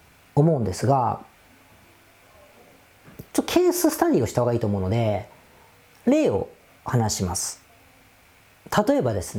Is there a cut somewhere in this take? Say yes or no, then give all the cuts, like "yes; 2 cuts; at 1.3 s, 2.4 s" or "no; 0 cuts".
no; 0 cuts